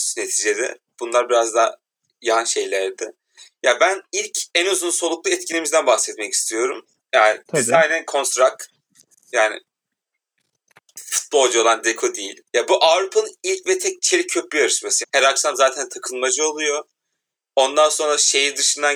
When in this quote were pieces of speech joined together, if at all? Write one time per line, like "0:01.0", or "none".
0:09.3
0:12.4
0:15.0